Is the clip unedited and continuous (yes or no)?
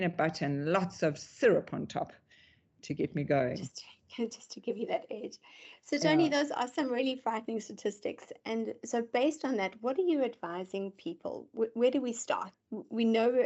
yes